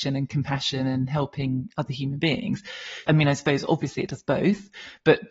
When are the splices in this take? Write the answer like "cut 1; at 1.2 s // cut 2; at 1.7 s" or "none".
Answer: cut 1; at 3.0 s